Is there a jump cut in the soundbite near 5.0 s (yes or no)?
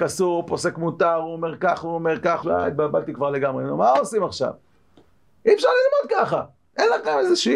no